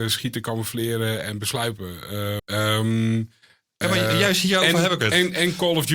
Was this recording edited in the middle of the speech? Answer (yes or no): yes